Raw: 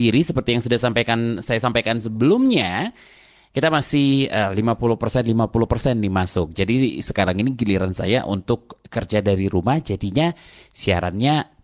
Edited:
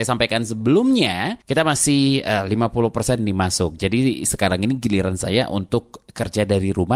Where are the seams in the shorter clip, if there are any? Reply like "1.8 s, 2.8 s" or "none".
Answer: 1.4 s, 3.2 s